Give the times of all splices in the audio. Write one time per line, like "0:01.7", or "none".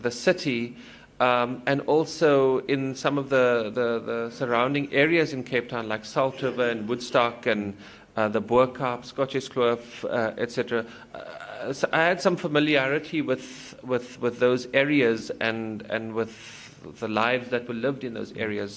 none